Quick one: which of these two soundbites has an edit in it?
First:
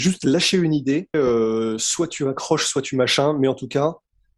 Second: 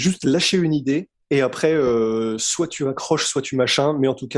first; 1 cut; at 1.1 s

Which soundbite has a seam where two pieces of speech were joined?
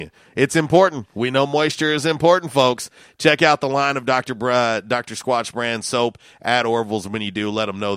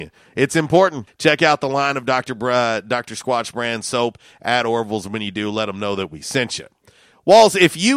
second; 1 cut; at 1.1 s

